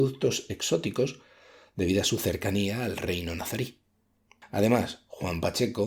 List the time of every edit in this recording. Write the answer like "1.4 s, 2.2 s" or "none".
none